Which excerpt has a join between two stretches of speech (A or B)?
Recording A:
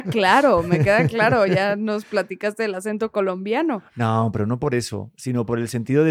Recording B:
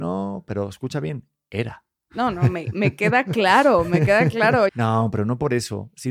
B